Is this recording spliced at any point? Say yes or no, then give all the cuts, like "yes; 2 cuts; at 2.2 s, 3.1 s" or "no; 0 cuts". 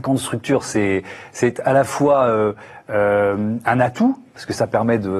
no; 0 cuts